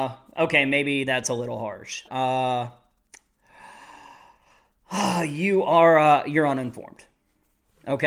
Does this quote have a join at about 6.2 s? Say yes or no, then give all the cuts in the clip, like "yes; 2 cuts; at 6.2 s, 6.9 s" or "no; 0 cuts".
no; 1 cut; at 2.1 s